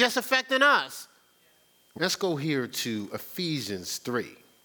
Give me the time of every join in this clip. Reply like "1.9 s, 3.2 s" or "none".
2.0 s